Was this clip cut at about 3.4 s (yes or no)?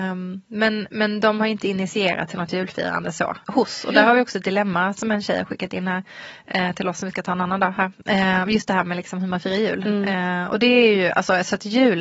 yes